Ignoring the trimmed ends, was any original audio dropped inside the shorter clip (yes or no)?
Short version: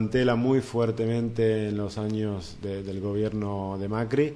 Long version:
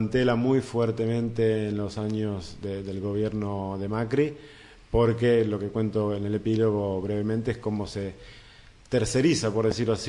no